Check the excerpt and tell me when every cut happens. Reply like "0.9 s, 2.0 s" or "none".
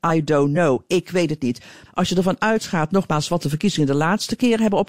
1.9 s